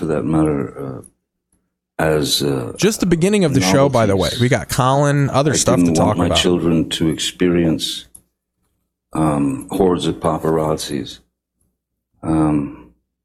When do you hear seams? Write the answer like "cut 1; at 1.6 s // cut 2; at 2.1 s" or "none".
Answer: none

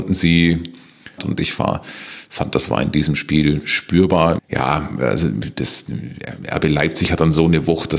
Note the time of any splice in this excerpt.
cut 1; at 1.2 s // cut 2; at 4.4 s

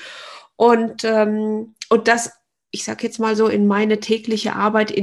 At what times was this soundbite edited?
none

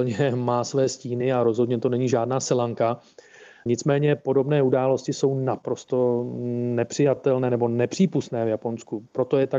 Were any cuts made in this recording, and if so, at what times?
none

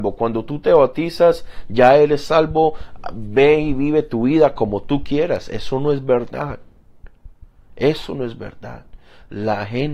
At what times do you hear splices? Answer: none

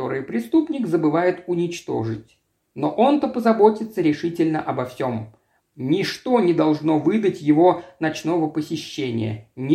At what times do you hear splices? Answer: cut 1; at 5.6 s

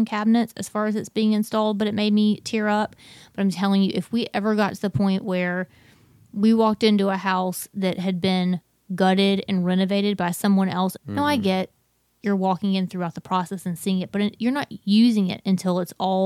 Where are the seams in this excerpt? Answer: cut 1; at 11.0 s

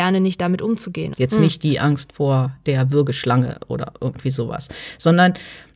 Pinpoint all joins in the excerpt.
cut 1; at 1.1 s

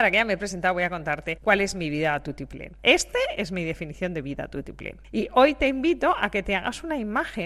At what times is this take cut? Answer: cut 1; at 2.8 s

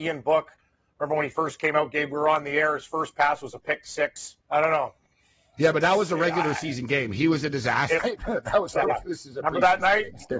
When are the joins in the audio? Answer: cut 1; at 4.4 s // cut 2; at 8.0 s

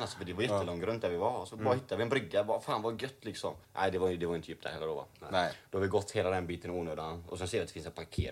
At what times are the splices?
cut 1; at 3.6 s

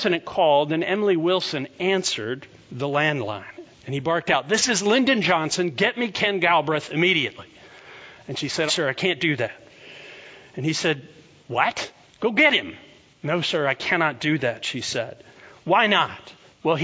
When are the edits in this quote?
cut 1; at 8.7 s

